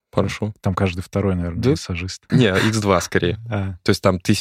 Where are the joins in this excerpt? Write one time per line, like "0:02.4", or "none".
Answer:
0:02.3